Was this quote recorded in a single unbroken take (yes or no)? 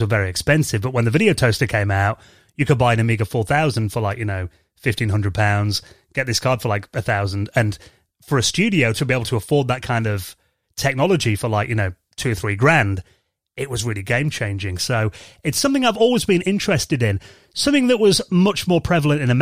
yes